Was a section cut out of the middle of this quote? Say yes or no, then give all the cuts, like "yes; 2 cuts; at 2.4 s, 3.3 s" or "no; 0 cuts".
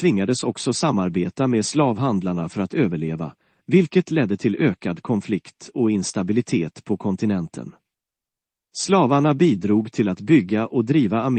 yes; 1 cut; at 8.7 s